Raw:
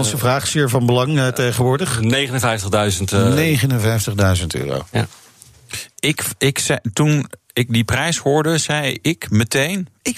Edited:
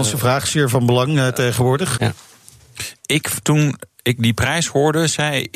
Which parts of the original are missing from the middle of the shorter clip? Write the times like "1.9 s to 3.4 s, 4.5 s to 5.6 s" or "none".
2.0 s to 4.9 s, 6.4 s to 6.9 s